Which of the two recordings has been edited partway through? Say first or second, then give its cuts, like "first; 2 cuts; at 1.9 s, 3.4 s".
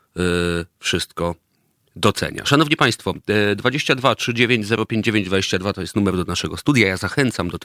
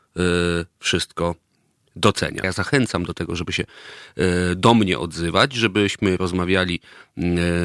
second; 1 cut; at 2.4 s